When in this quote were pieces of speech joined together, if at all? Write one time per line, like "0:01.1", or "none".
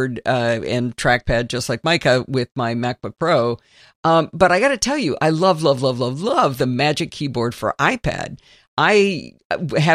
none